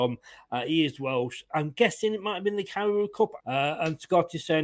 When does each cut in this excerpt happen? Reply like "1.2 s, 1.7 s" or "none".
3.4 s